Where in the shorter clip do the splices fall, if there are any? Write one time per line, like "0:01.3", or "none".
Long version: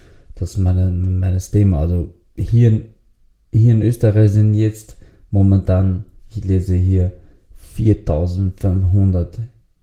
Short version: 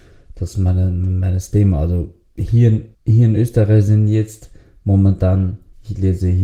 0:02.9